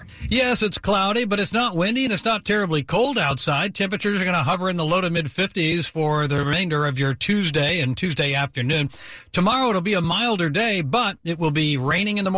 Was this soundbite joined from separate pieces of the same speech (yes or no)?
no